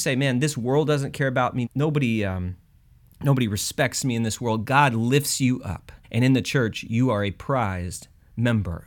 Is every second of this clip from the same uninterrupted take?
no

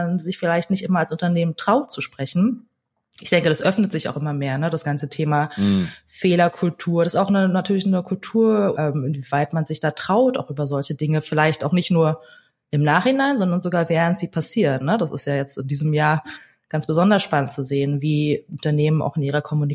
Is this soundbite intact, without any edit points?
no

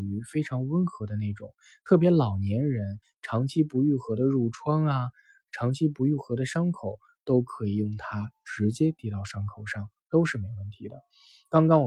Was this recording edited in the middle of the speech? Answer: no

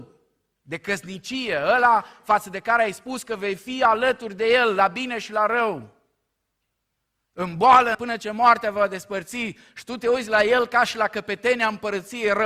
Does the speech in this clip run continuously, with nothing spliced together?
no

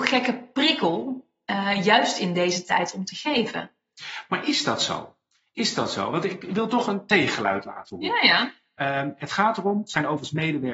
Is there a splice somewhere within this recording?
no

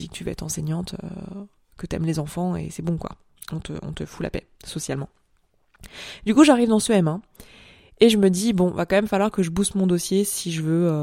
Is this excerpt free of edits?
yes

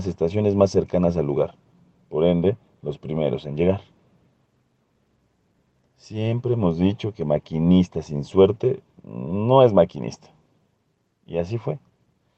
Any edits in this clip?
no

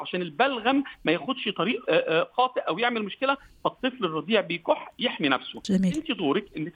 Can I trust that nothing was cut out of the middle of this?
no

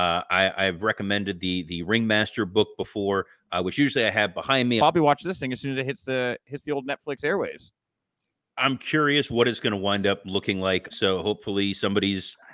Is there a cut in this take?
yes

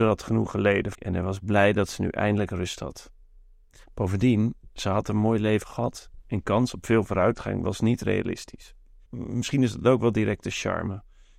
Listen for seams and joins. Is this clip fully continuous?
no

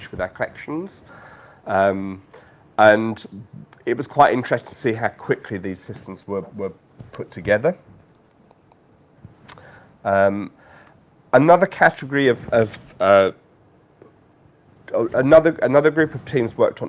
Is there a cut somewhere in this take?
no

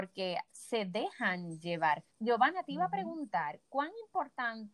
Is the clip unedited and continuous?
no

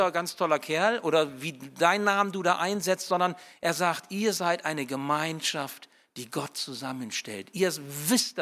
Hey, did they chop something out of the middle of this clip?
no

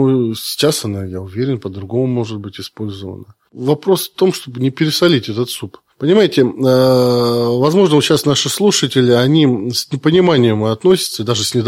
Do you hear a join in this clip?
no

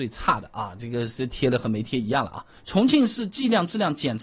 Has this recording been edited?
yes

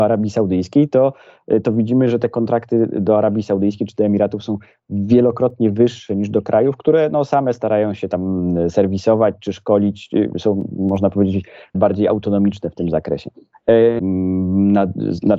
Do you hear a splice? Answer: yes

